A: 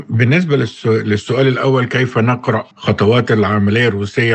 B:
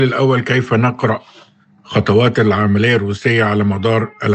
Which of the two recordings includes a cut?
A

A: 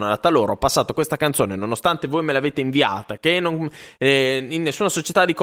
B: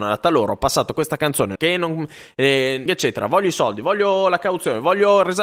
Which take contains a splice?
B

